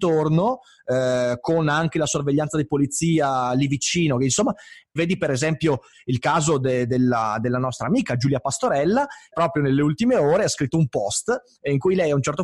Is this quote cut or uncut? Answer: cut